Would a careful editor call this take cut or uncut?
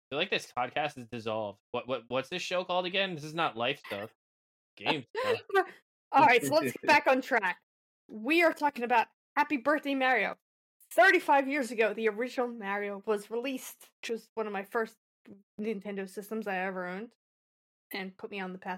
cut